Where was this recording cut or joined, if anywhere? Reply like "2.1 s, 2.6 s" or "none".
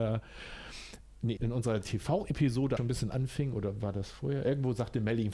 1.4 s, 2.8 s